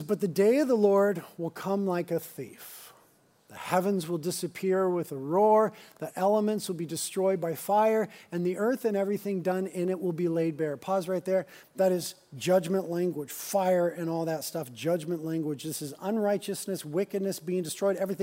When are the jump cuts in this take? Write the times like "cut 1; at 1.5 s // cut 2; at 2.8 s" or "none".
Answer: none